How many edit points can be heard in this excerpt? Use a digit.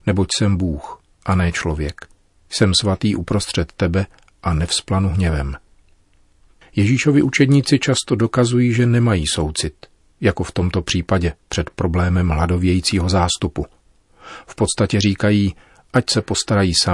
0